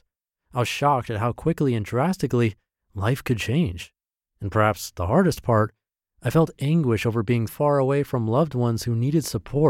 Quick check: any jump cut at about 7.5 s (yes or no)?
yes